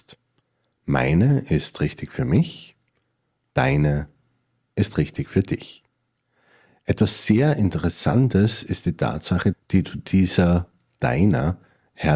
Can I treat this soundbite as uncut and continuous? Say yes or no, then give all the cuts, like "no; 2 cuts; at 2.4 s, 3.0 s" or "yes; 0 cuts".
no; 1 cut; at 9.5 s